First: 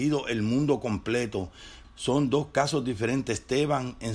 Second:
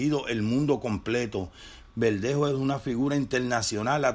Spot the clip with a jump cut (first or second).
first